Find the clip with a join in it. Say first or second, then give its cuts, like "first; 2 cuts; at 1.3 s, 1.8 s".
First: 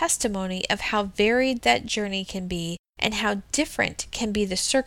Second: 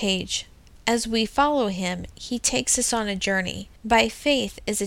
second; 1 cut; at 3.8 s